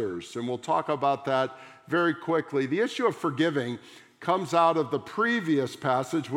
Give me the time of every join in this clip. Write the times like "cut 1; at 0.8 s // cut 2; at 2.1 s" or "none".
none